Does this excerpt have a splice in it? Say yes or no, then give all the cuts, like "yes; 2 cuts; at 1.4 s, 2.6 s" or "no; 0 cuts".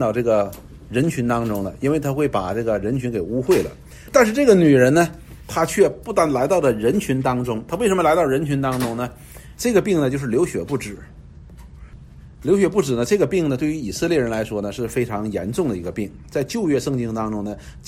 yes; 1 cut; at 9.6 s